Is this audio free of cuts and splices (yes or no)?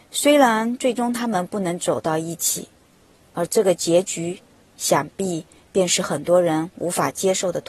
yes